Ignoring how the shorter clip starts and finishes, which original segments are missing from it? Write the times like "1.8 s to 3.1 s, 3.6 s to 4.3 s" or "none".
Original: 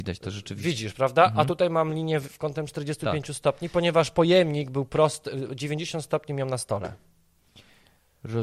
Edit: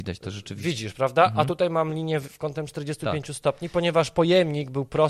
none